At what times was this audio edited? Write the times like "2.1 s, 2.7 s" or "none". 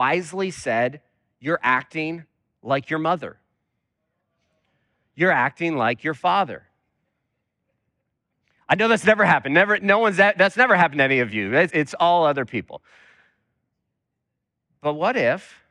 11.7 s